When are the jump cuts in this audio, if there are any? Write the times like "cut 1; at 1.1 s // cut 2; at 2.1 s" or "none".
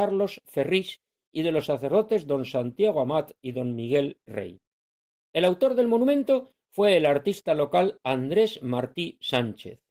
none